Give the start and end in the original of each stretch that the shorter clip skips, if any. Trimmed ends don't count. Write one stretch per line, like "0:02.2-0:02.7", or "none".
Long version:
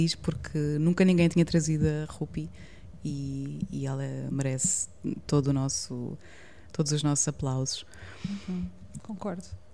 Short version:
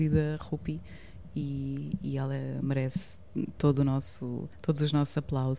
0:06.2-0:06.6

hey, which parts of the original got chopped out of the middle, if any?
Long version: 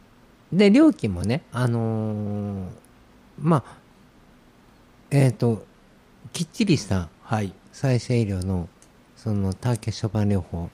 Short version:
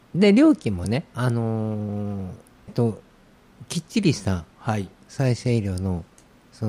0:03.1-0:05.3

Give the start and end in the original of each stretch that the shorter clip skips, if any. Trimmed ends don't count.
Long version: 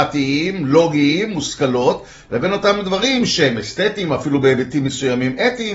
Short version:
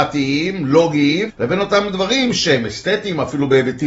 0:01.3-0:02.2

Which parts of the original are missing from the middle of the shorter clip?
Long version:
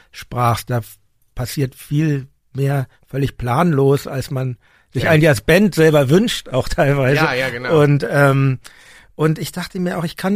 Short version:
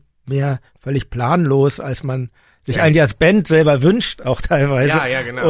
none

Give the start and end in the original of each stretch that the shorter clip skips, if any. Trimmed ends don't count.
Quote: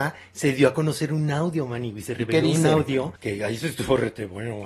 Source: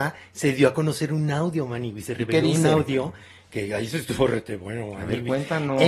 0:03.2-0:03.5

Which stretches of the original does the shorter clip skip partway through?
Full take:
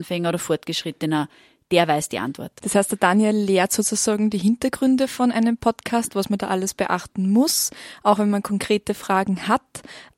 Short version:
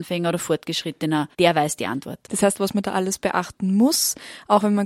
0:01.3-0:01.7
0:02.9-0:06.1

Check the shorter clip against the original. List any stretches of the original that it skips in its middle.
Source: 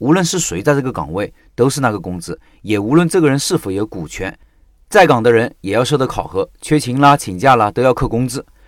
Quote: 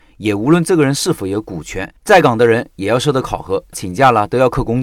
0:04.4-0:04.8
0:06.6-0:07.2

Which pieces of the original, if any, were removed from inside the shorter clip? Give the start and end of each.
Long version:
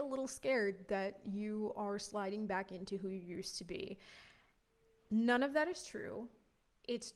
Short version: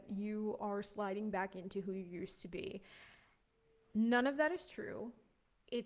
none

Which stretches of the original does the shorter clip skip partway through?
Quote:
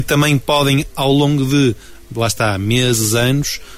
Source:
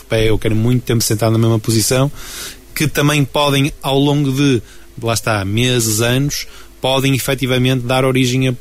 none

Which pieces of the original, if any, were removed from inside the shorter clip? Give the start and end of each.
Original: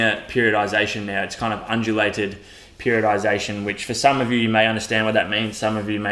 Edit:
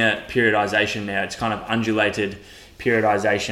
none

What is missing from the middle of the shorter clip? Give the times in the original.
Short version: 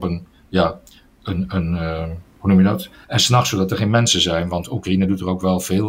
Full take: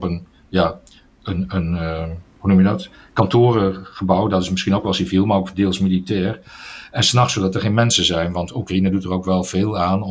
0:03.0-0:06.9

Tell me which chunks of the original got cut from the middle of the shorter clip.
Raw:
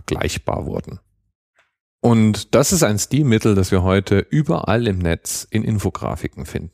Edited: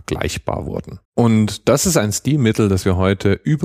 0:01.0-0:01.9

